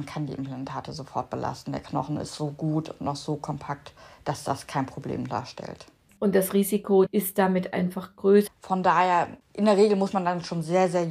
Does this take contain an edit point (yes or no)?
yes